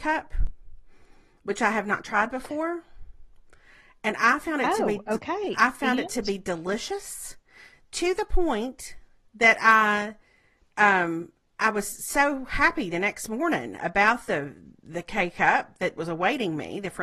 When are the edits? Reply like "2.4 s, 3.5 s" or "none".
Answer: none